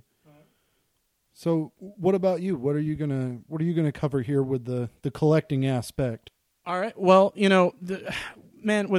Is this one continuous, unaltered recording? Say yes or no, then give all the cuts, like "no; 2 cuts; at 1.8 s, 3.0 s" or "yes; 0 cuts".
yes; 0 cuts